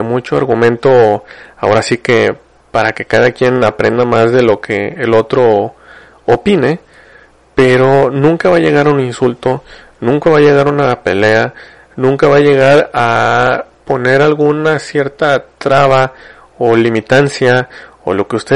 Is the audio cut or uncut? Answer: uncut